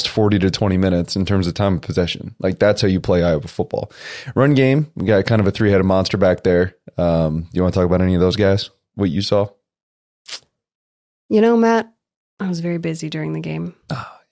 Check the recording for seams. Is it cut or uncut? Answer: uncut